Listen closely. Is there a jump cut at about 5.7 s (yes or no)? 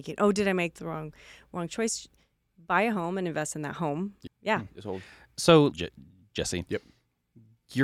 yes